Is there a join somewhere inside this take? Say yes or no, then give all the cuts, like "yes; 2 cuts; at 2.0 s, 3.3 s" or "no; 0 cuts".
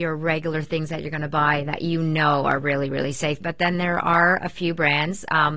yes; 1 cut; at 3.4 s